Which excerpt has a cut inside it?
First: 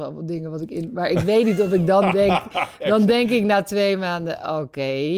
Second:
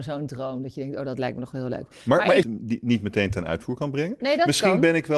second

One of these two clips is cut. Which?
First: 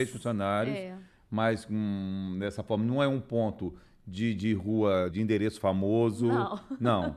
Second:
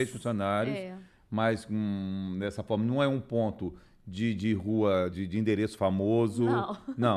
first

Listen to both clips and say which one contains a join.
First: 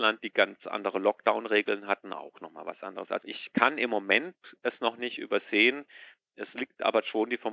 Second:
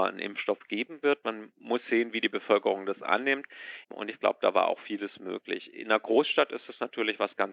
second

